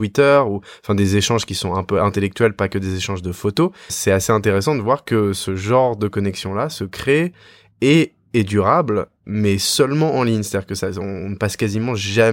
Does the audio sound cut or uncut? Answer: uncut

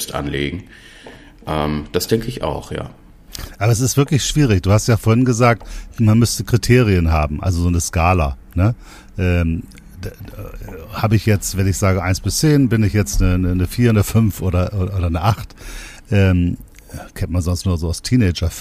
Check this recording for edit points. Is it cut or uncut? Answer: uncut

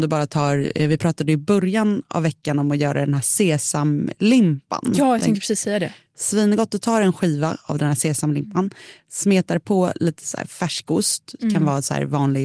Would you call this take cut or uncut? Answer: uncut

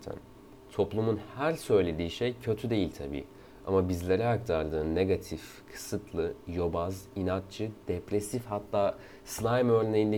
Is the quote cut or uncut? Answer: uncut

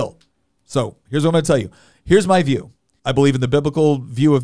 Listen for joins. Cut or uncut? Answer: cut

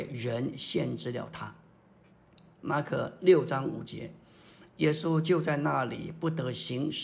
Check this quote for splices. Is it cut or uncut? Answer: uncut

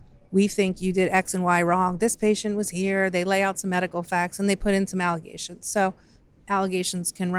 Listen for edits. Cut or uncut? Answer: uncut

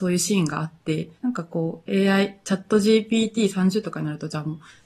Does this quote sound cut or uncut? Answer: cut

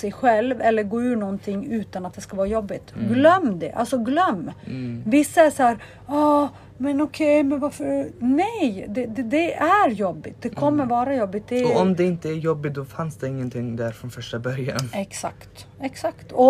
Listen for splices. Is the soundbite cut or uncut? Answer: uncut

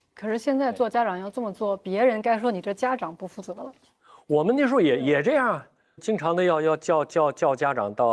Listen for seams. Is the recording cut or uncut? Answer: cut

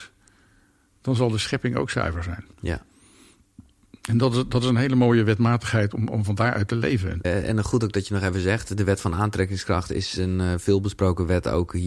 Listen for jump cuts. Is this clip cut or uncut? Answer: cut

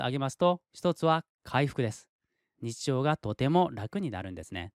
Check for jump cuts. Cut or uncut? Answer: cut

